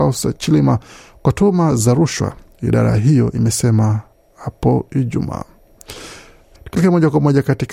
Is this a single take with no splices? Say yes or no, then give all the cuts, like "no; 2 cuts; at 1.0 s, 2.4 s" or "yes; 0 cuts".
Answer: no; 1 cut; at 6.6 s